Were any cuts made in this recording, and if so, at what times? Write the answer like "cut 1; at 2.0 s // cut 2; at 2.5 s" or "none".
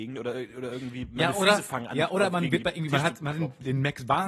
none